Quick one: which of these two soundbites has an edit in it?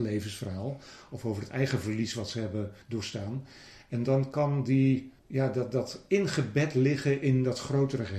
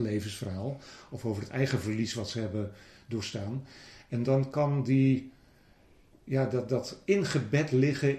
first; 2 cuts; at 2.8 s, 5.2 s

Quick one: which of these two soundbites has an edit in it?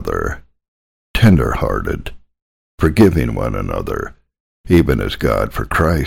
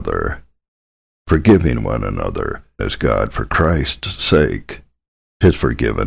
second; 2 cuts; at 1.1 s, 2.8 s

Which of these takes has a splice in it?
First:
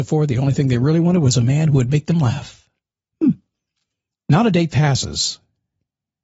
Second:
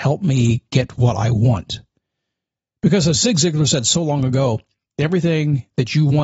first; 1 cut; at 4.1 s

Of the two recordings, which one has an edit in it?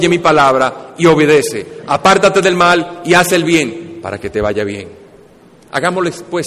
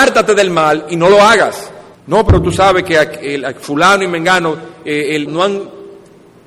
second; 2 cuts; at 1.9 s, 5.3 s

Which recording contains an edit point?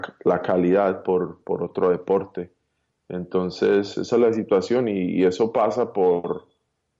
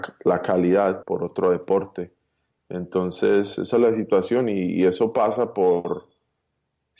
second; 1 cut; at 1.0 s

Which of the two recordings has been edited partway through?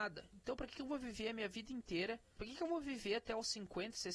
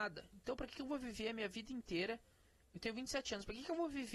first; 1 cut; at 2.4 s

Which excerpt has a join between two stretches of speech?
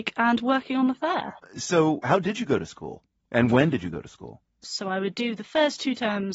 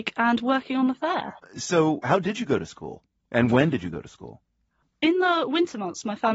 first; 1 cut; at 4.6 s

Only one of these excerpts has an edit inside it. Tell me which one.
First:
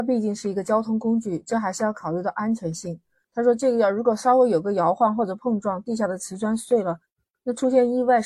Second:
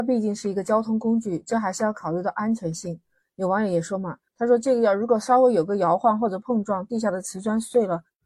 first; 1 cut; at 3.2 s

